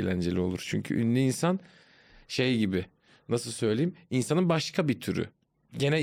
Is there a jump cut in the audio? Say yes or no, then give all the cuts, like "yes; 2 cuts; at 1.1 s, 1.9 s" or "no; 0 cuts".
no; 0 cuts